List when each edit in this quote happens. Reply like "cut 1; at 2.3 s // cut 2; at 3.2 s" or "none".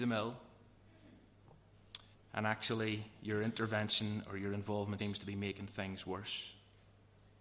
cut 1; at 2.1 s // cut 2; at 5.0 s

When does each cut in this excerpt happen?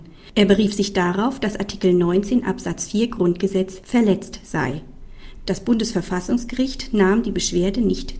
none

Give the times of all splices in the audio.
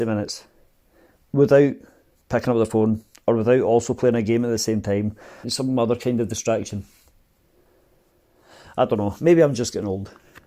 cut 1; at 5.4 s

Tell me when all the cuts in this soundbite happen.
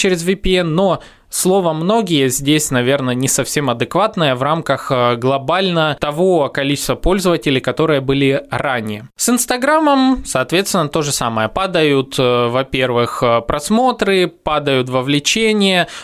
none

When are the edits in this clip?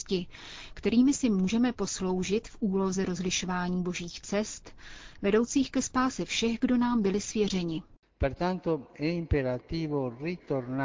none

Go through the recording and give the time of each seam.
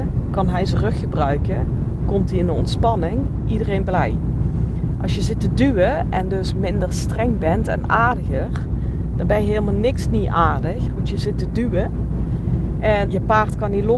cut 1; at 13.0 s

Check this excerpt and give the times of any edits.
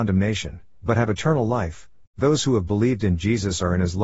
cut 1; at 2.0 s

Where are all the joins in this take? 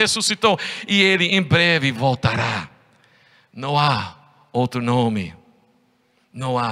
none

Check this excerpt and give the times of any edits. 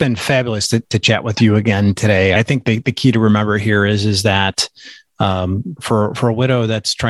cut 1; at 2.4 s // cut 2; at 5.8 s

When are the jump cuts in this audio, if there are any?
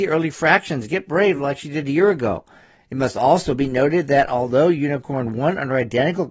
none

